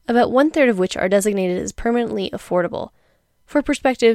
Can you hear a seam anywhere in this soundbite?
no; 0 cuts

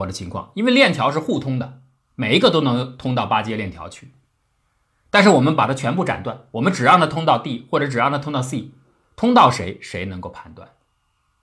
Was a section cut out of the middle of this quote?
no; 0 cuts

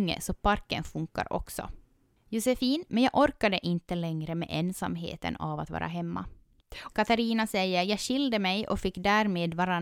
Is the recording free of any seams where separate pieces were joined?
no; 2 cuts; at 2.9 s, 6.9 s

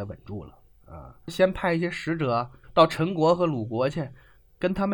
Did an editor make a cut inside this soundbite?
yes; 1 cut; at 1.3 s

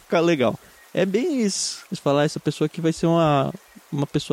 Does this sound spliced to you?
yes; 1 cut; at 1.9 s

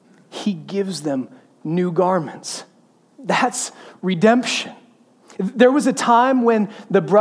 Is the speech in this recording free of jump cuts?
yes; 0 cuts

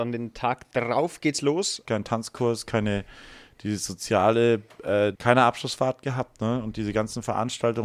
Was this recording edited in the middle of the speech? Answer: yes; 2 cuts; at 1.8 s, 5.1 s

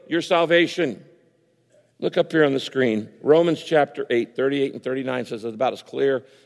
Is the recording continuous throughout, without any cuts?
no; 1 cut; at 1.9 s

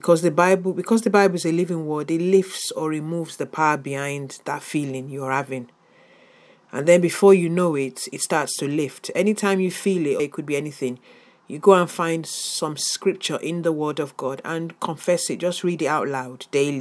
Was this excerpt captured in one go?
no; 1 cut; at 10.2 s

